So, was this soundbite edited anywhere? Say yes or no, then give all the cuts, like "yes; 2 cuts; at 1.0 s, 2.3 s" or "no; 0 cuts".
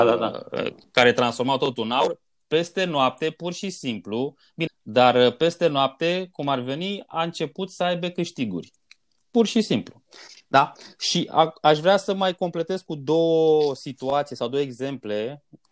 yes; 1 cut; at 4.7 s